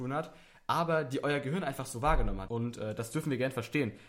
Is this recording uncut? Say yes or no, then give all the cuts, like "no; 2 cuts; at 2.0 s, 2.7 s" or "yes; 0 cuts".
no; 1 cut; at 2.5 s